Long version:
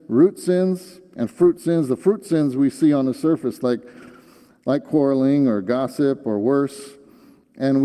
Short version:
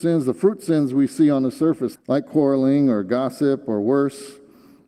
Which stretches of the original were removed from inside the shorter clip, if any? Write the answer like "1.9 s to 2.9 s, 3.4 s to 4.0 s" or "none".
3.6 s to 4.5 s

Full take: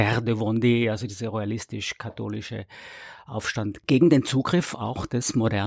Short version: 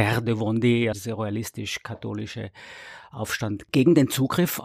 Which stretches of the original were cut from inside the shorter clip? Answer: 0.9 s to 1.1 s

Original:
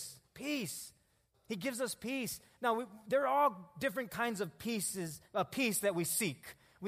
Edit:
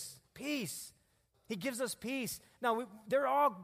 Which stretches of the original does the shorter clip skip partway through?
none

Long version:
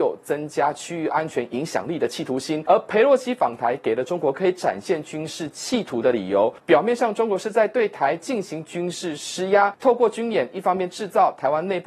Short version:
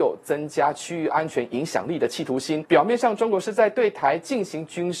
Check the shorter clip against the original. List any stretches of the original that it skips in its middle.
2.6 s to 6.6 s

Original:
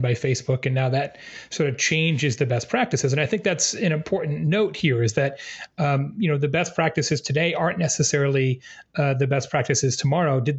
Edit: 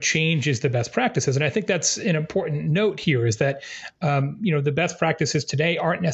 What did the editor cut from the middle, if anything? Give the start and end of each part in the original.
none

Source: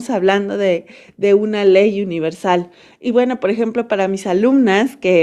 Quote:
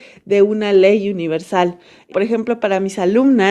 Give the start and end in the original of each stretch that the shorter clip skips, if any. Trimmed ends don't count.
3.0 s to 3.4 s

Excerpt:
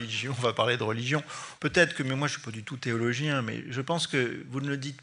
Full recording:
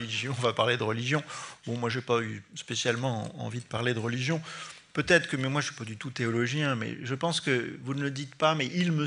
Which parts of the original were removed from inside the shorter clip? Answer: 1.6 s to 4.9 s

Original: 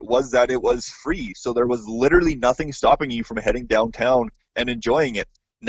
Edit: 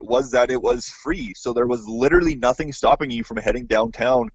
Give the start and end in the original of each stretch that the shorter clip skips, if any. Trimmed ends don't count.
none

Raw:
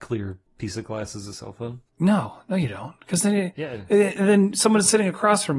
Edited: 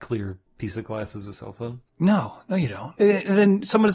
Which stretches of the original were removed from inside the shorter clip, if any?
3.0 s to 3.9 s

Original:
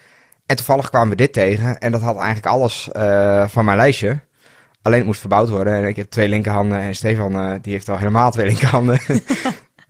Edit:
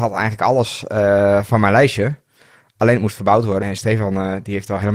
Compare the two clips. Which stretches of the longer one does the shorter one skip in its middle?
5.7 s to 6.8 s

